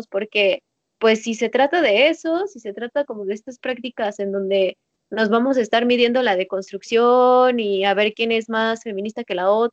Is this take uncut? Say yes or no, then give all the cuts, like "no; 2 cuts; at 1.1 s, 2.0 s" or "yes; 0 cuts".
yes; 0 cuts